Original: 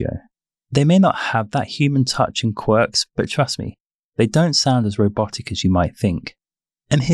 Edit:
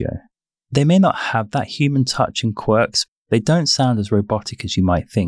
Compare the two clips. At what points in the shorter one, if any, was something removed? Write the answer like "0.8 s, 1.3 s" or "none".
3.1 s